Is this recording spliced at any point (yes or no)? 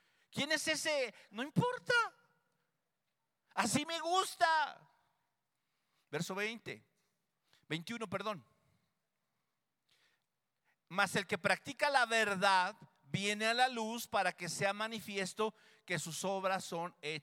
yes